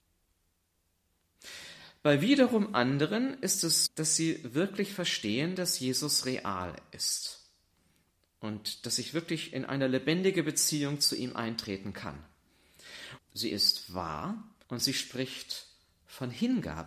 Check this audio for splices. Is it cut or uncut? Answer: cut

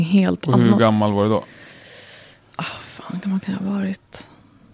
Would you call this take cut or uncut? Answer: uncut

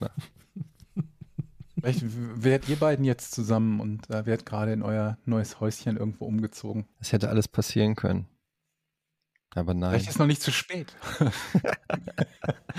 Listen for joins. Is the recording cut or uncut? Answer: cut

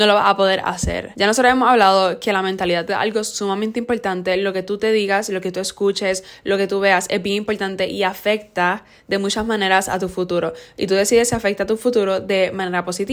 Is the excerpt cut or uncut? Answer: uncut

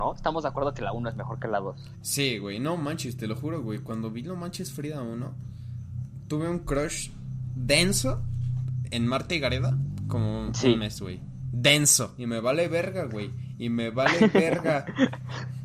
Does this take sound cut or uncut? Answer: cut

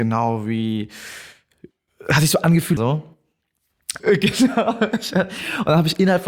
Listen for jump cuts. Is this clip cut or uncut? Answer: cut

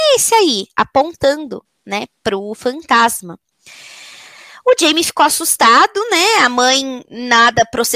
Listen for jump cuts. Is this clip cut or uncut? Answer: uncut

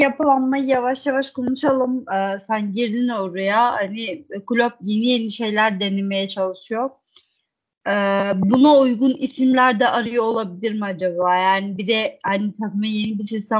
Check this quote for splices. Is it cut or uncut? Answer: uncut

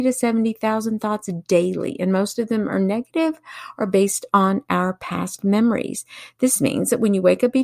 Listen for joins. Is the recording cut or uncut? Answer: uncut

